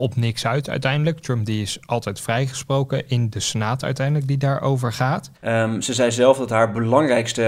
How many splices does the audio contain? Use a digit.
1